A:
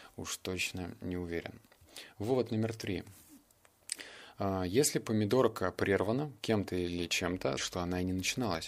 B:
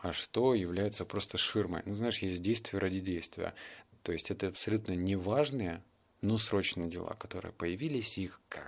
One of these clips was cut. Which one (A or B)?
A